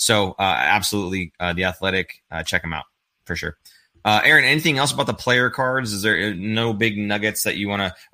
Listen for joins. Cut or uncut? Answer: uncut